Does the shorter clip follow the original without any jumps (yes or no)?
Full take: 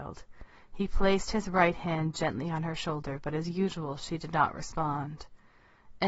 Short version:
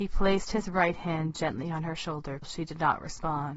no